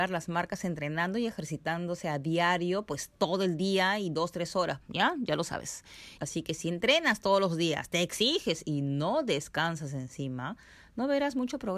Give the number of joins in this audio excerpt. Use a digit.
2